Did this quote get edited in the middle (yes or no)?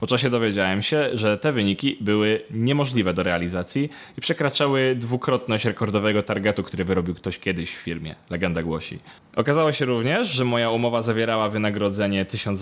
yes